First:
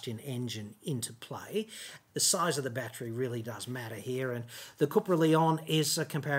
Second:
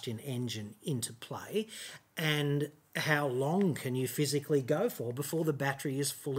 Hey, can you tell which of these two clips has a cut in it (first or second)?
first